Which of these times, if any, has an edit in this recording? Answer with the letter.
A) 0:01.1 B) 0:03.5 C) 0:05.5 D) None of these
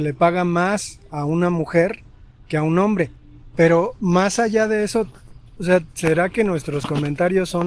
B